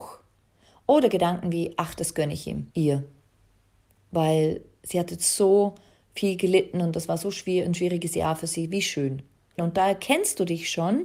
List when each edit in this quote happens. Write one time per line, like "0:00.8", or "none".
0:02.7
0:09.6

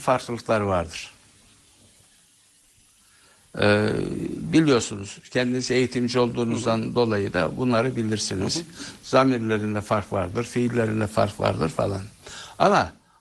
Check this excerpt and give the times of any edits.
none

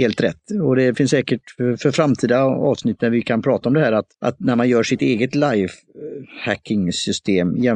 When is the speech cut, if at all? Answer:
0:04.1

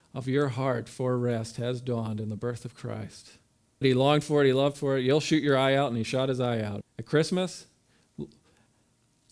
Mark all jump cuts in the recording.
0:03.8
0:06.8

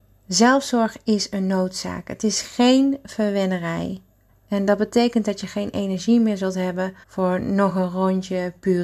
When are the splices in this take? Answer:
0:04.3
0:07.0

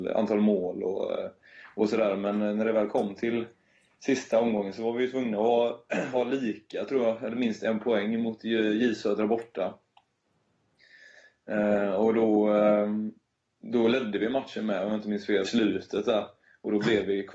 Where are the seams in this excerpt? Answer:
0:15.4

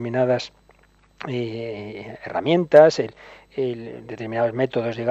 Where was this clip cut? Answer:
none

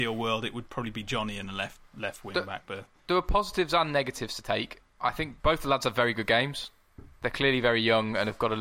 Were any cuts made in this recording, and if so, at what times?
0:05.4

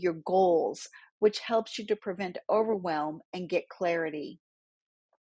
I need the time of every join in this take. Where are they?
0:01.1

